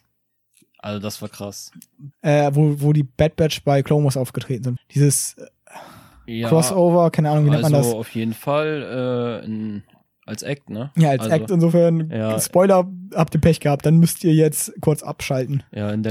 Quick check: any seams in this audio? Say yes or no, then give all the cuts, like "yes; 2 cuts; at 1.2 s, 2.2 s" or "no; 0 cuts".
yes; 3 cuts; at 2.1 s, 4.8 s, 11.5 s